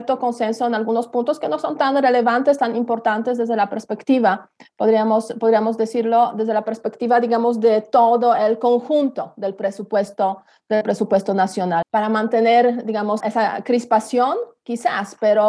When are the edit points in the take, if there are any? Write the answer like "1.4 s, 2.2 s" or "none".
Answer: 11.8 s, 13.2 s